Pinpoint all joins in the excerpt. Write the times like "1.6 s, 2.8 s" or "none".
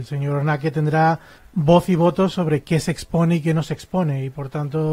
1.4 s